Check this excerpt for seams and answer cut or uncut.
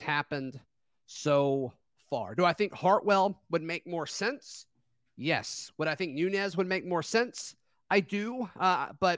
uncut